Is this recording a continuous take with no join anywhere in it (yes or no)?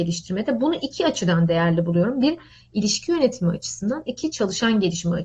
yes